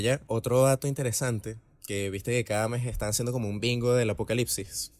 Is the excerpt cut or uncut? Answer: uncut